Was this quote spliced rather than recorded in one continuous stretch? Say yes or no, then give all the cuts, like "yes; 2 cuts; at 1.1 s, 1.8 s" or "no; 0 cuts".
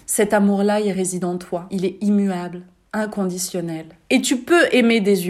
no; 0 cuts